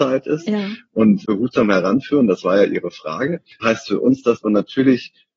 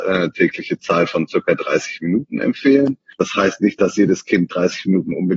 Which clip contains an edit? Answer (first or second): first